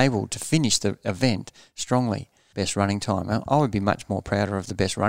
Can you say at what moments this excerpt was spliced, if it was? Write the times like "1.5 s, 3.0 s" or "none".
2.5 s